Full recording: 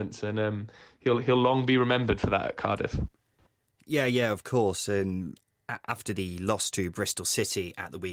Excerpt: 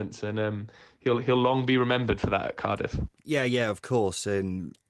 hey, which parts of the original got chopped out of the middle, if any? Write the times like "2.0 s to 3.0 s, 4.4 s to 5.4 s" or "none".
3.1 s to 3.7 s